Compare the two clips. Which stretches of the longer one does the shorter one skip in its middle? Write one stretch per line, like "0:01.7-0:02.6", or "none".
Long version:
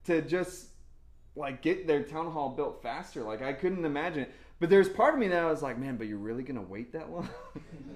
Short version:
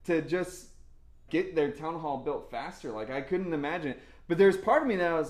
0:01.3-0:01.6